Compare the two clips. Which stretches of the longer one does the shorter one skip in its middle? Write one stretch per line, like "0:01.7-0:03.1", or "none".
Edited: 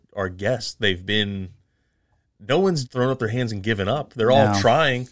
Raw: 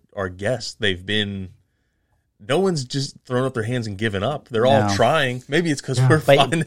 0:02.9-0:03.2